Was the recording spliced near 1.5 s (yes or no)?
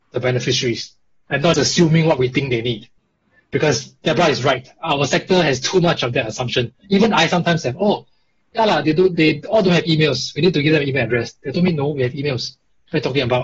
yes